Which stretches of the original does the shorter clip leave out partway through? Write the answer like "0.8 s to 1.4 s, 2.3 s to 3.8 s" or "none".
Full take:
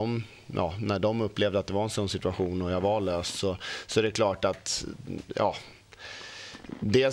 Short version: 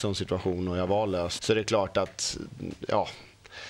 3.3 s to 3.9 s